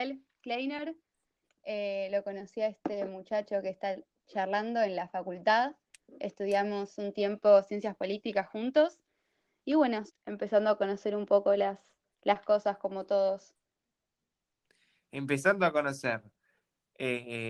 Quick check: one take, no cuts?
no; 1 cut; at 10.1 s

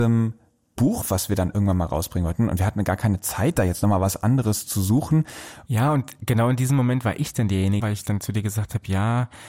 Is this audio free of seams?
no; 2 cuts; at 5.7 s, 7.8 s

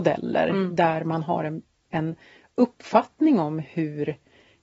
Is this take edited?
no; 0 cuts

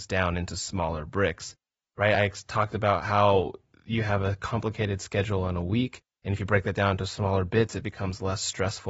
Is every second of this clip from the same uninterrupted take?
yes; 0 cuts

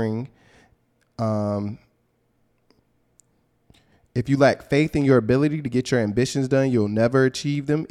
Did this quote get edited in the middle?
no; 0 cuts

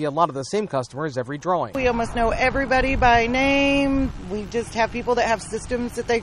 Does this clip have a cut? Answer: no; 0 cuts

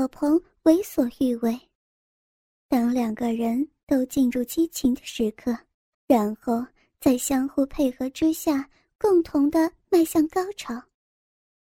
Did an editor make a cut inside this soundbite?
yes; 1 cut; at 5.9 s

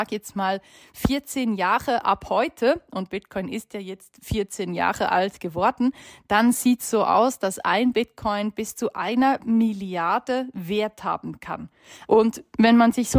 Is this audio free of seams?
no; 1 cut; at 12.1 s

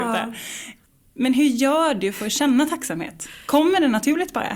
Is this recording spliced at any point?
no; 0 cuts

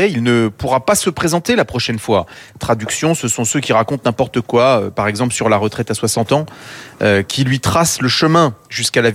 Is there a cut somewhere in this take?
yes; 1 cut; at 2.6 s

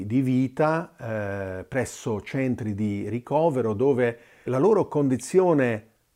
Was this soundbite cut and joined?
yes; 1 cut; at 4.5 s

